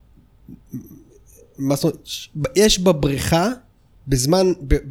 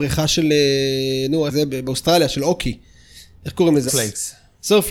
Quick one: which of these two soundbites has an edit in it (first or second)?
second